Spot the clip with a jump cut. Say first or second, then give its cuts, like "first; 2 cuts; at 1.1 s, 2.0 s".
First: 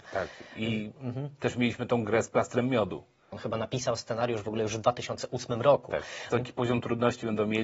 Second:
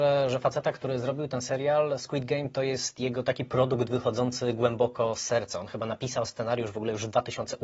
first; 2 cuts; at 3.3 s, 6.3 s